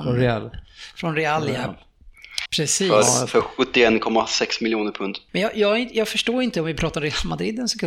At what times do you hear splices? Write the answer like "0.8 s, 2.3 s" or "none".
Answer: 2.5 s, 5.3 s